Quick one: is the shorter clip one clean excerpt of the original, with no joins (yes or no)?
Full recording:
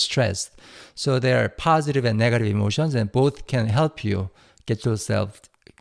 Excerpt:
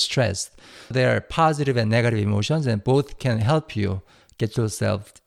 no